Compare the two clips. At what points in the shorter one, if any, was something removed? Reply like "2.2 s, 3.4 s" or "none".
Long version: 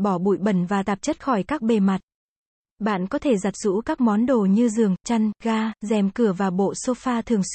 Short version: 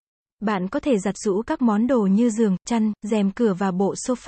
3.0 s